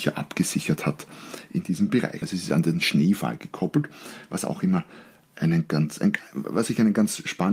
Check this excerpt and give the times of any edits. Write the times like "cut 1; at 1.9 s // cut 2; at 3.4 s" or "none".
cut 1; at 2.2 s